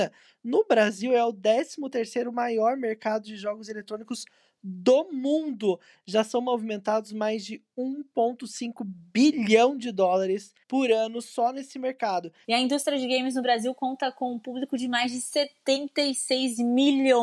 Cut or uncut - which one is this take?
cut